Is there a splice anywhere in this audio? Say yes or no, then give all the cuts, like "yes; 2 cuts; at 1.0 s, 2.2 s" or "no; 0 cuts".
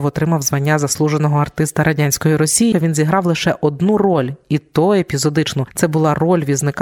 yes; 1 cut; at 2.7 s